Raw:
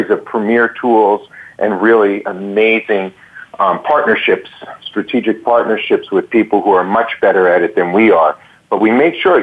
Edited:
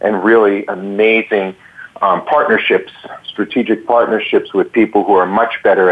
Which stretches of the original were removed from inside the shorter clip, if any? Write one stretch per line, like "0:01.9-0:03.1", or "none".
none